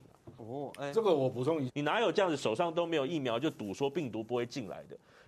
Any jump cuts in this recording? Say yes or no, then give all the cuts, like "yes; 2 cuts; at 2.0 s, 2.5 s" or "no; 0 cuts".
yes; 1 cut; at 1.7 s